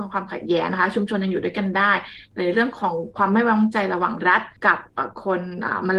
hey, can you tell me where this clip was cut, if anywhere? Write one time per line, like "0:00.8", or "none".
0:04.6